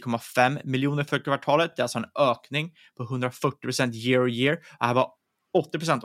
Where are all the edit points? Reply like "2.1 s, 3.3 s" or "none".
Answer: none